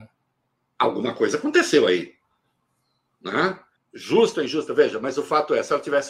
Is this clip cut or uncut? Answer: cut